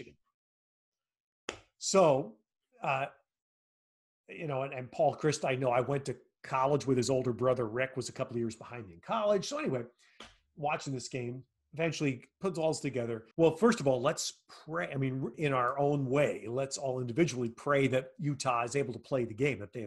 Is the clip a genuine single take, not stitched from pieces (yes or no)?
no